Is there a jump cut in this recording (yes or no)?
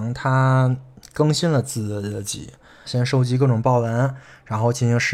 yes